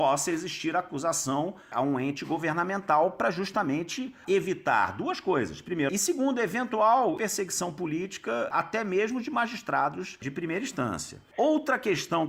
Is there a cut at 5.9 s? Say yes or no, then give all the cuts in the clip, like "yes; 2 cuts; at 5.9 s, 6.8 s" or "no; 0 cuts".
yes; 1 cut; at 5.9 s